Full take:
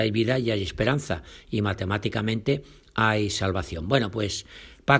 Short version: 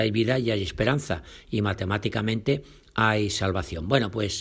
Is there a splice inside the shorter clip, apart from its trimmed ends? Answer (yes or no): no